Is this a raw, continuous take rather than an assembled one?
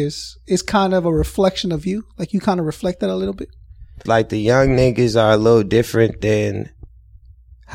no; 1 cut; at 4.1 s

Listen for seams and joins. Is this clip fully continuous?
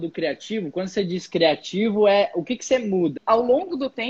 no; 1 cut; at 3.2 s

